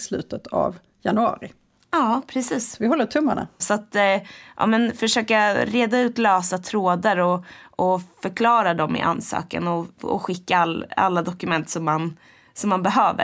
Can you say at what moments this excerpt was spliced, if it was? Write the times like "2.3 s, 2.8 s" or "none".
3.6 s